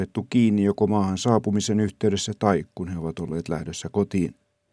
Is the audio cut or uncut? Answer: uncut